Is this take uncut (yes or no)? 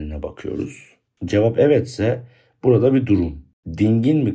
no